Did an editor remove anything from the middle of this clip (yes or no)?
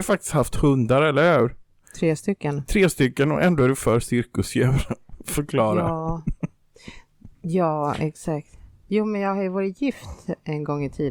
no